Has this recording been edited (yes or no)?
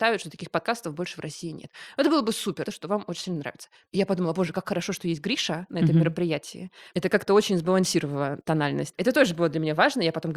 yes